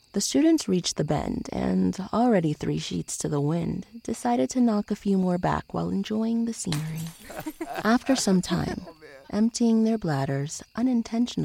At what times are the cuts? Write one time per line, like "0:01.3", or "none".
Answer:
0:09.2